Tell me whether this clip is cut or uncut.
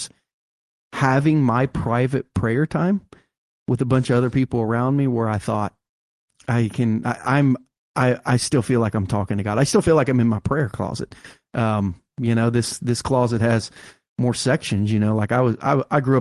uncut